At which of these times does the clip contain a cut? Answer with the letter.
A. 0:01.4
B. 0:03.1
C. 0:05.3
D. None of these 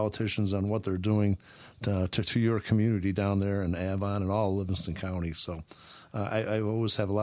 D